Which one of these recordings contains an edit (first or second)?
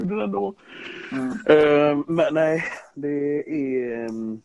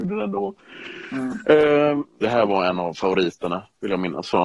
second